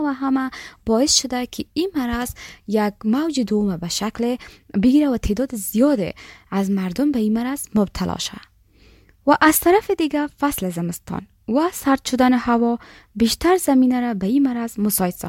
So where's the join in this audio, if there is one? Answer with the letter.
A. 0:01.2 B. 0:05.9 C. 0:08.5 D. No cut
D